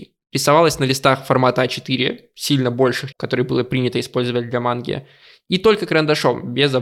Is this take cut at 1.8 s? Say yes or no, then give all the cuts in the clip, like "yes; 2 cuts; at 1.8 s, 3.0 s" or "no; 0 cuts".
no; 1 cut; at 3.1 s